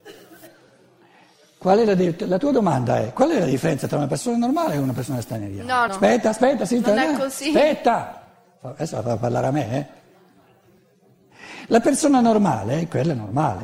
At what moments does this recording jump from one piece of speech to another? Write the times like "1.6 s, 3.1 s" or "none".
5.9 s